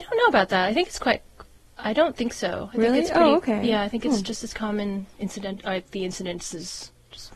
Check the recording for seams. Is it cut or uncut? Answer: uncut